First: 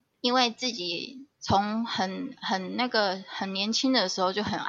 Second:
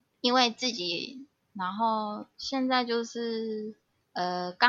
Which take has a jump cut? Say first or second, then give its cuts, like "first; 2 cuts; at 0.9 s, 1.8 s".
second; 1 cut; at 1.3 s